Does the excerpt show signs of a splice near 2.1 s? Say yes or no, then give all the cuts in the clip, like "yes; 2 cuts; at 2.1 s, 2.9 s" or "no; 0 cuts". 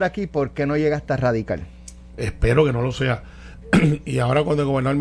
yes; 1 cut; at 2.1 s